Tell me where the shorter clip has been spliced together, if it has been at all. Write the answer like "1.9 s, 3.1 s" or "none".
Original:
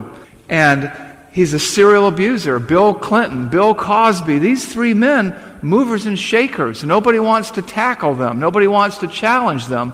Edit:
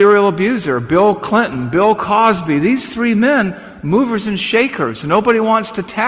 none